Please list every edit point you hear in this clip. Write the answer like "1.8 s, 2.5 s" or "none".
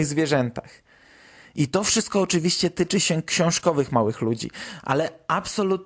none